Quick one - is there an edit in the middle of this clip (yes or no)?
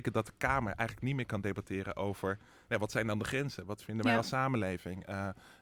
no